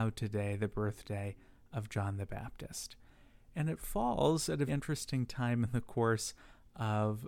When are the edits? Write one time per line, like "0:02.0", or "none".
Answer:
0:04.7

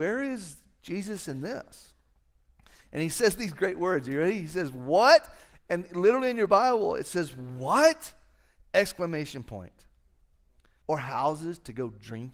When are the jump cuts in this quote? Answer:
0:05.5
0:10.8

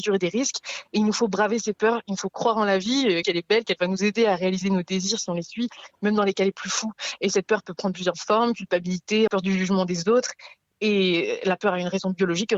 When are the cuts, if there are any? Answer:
0:03.2
0:07.2
0:09.3

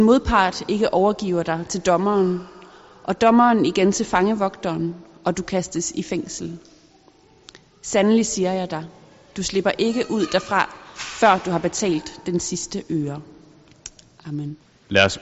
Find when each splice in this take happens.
none

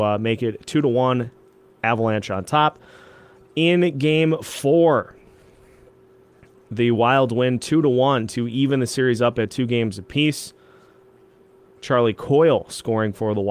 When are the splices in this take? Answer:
none

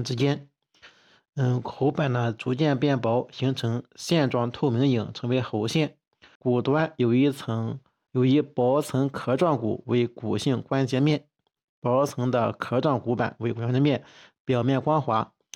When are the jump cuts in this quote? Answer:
0:06.4

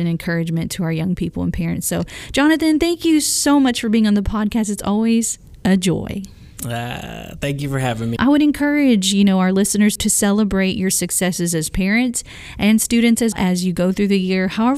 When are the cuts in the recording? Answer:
0:08.2
0:13.3

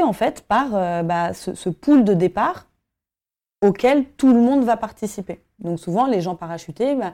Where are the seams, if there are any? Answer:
0:05.6

